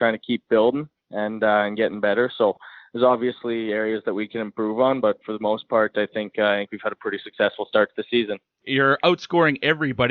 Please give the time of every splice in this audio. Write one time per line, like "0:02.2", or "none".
none